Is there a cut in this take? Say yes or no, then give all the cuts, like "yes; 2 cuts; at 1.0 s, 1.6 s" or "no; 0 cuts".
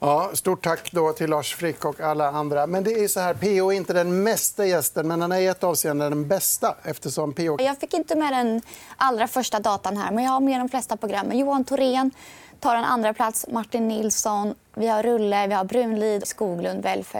yes; 2 cuts; at 7.6 s, 16.2 s